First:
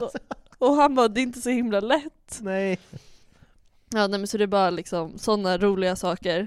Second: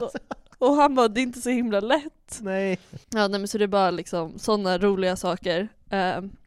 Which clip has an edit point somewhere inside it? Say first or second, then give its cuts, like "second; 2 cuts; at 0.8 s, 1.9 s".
second; 1 cut; at 3.0 s